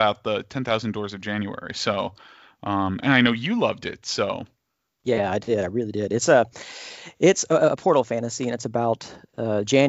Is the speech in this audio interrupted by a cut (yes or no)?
no